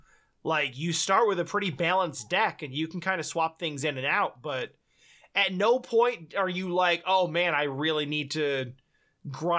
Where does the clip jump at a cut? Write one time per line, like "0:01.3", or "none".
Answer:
none